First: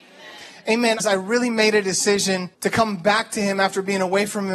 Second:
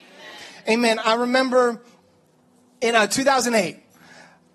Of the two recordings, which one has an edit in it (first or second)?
first